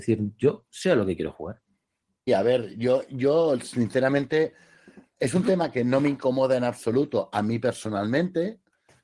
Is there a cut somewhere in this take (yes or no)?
yes